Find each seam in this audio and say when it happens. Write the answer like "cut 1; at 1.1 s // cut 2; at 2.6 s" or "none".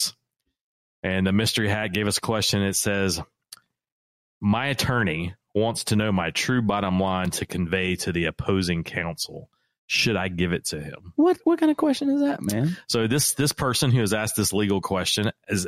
none